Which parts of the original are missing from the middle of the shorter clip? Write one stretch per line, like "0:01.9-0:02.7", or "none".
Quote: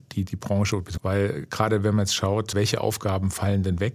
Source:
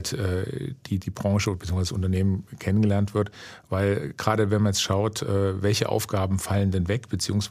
0:01.7-0:03.6
0:05.2-0:05.6